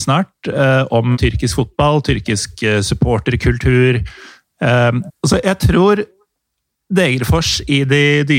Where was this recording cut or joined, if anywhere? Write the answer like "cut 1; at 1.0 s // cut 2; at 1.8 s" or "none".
cut 1; at 1.1 s // cut 2; at 5.1 s